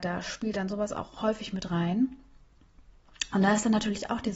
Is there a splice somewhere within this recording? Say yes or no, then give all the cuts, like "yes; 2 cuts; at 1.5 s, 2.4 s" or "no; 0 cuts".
no; 0 cuts